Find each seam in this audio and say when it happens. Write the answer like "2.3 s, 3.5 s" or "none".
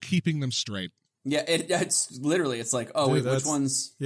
none